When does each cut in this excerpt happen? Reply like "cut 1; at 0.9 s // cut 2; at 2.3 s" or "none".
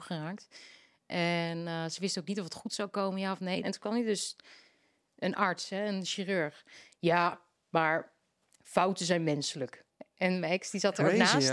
cut 1; at 3.6 s